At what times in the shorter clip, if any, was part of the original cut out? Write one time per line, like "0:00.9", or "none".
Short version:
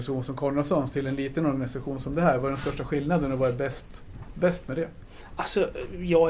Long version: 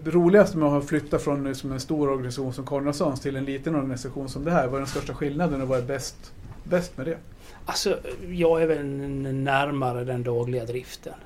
none